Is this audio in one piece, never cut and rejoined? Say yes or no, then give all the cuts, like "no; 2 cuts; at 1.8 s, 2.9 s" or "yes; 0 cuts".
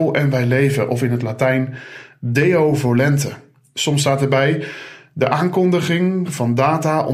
yes; 0 cuts